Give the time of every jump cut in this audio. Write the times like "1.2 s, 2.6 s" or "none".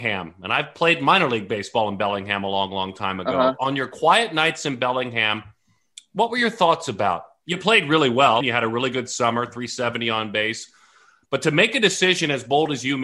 8.4 s

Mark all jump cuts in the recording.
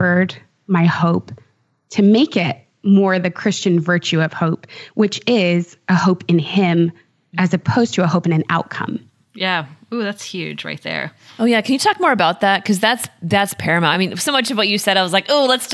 none

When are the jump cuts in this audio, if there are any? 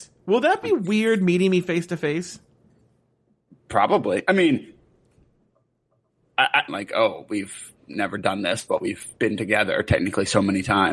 6.7 s, 9.2 s

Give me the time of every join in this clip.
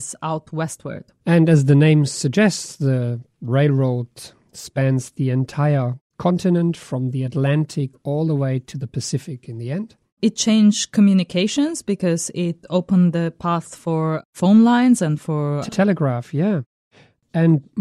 none

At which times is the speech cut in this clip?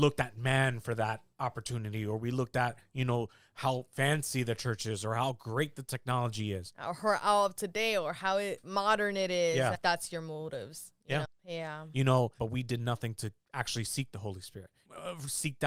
9.7 s, 11.2 s, 12.4 s

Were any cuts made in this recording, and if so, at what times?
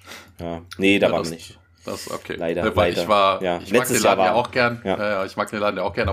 none

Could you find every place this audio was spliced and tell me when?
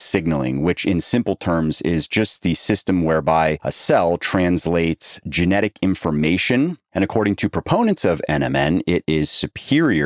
6.9 s

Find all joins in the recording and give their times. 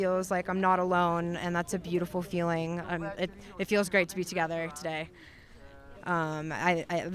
2.8 s, 5.9 s

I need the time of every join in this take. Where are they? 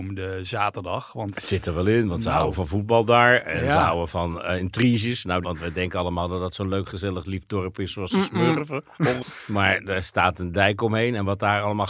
5.4 s, 9.2 s

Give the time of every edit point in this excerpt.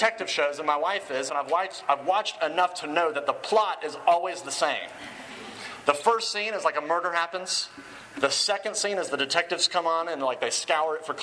1.3 s

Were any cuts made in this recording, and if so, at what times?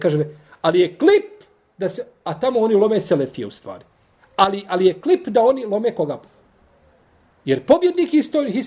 none

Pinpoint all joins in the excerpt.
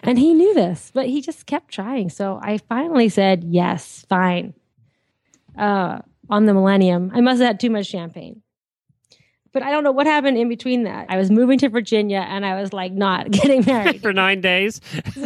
11.1 s, 14.0 s

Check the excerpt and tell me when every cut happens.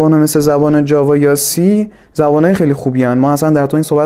2.6 s

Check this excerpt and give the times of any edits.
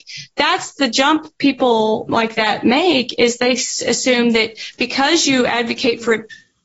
2.1 s

